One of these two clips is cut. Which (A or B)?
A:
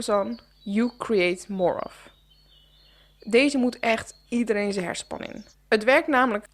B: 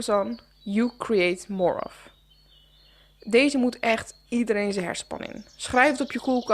A